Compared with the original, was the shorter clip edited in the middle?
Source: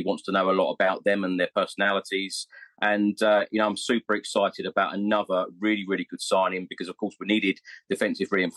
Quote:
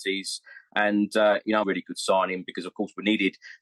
yes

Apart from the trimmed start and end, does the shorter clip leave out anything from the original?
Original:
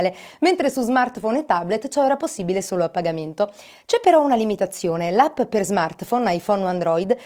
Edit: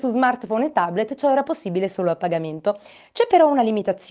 no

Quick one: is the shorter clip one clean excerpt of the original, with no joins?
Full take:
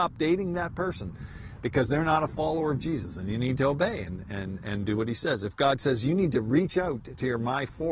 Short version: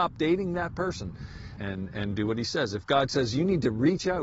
no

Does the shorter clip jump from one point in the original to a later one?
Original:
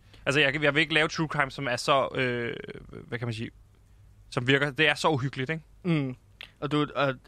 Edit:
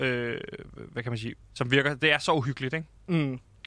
yes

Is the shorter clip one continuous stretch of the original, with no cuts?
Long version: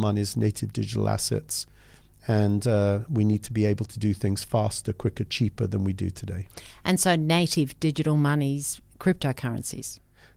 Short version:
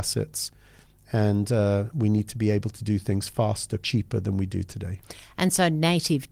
no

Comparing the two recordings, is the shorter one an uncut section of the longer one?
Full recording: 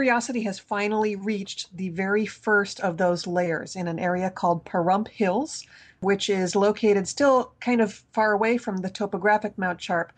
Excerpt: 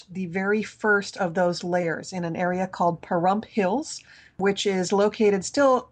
yes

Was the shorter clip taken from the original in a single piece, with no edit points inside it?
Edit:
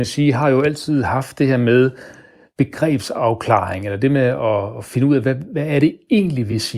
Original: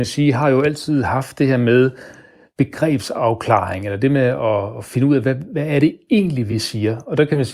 yes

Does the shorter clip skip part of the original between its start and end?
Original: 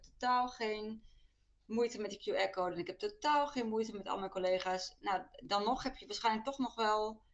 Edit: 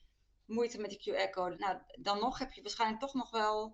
yes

